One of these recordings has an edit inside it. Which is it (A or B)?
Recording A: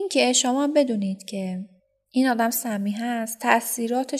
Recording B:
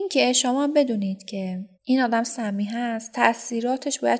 B